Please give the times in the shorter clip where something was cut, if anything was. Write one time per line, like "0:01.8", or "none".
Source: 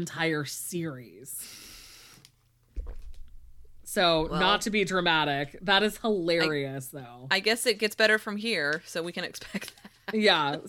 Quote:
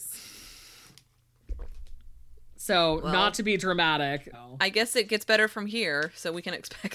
0:04.3